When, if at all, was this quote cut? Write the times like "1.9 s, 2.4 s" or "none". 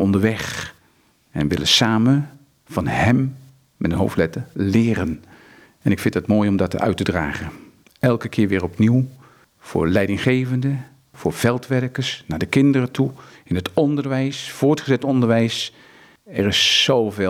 none